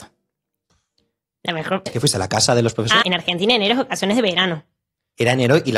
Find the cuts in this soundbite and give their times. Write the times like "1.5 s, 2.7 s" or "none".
1.9 s, 3.0 s